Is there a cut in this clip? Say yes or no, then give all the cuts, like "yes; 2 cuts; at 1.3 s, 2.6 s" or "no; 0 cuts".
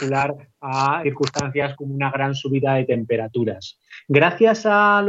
yes; 1 cut; at 1.0 s